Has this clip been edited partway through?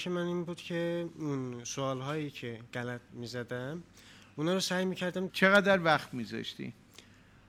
yes; 1 cut; at 5.3 s

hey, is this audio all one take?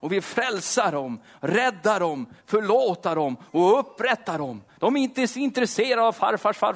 yes; 0 cuts

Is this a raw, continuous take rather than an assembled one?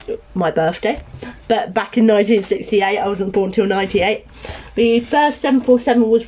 yes; 0 cuts

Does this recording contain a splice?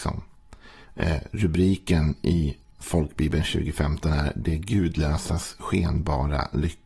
no; 0 cuts

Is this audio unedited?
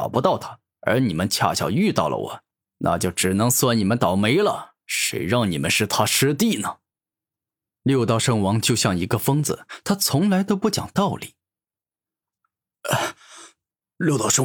yes; 0 cuts

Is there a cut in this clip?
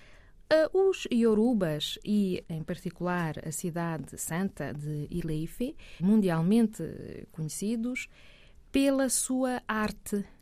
yes; 2 cuts; at 2.4 s, 6.0 s

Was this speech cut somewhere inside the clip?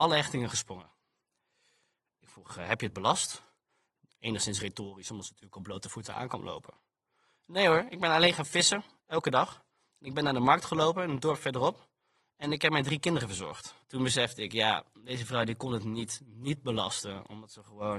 yes; 2 cuts; at 7.9 s, 13.8 s

